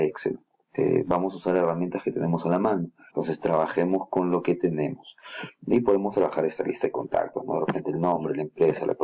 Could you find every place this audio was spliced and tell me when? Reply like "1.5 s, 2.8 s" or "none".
3.1 s